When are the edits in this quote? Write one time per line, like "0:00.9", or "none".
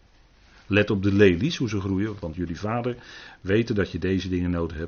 0:02.2